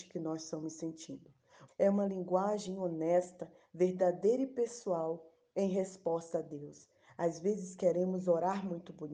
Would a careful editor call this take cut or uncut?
cut